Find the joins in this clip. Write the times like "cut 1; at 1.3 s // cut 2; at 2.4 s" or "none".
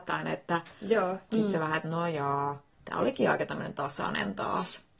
cut 1; at 1.3 s // cut 2; at 2.7 s

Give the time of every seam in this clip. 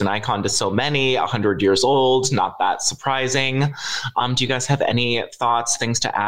none

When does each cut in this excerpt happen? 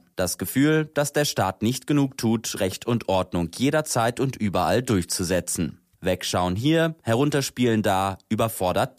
cut 1; at 2.6 s

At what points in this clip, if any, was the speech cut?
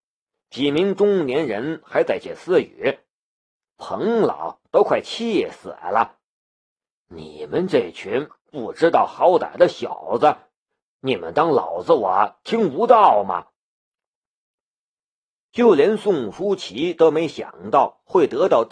cut 1; at 2.2 s

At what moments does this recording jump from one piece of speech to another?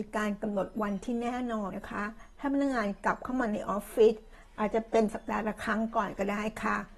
cut 1; at 1.7 s

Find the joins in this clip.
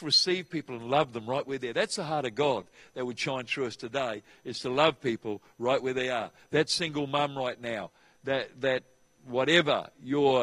cut 1; at 8.5 s

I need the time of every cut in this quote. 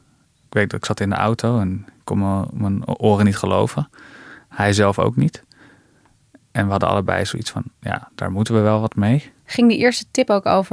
none

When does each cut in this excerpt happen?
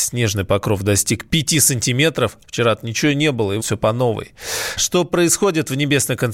cut 1; at 2.4 s // cut 2; at 3.6 s // cut 3; at 4.8 s

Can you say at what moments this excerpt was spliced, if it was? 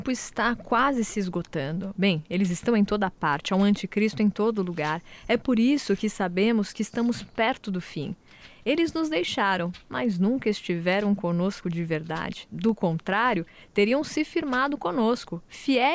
cut 1; at 1.9 s

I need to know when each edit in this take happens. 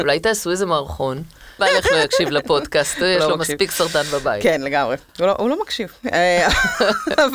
cut 1; at 1.6 s

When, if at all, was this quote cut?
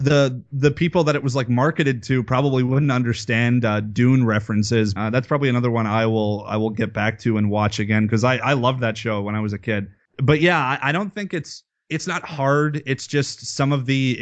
cut 1; at 5.0 s

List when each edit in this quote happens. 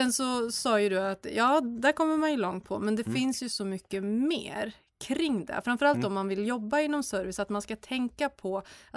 none

